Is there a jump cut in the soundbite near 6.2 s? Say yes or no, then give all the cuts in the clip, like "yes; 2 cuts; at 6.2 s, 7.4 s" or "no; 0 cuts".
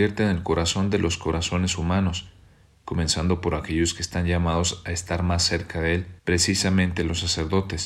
yes; 1 cut; at 6.2 s